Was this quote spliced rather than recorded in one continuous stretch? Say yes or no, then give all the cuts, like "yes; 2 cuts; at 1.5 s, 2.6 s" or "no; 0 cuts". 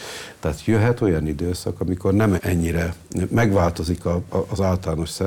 yes; 1 cut; at 2.4 s